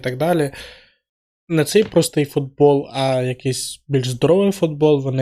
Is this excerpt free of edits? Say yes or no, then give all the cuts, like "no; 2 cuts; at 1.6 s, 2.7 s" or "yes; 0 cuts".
no; 1 cut; at 1.3 s